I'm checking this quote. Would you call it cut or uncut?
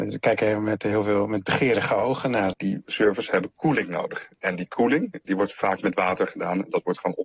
cut